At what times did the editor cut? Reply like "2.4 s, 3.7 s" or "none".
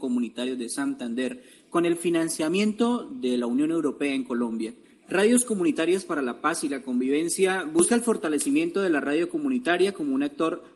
none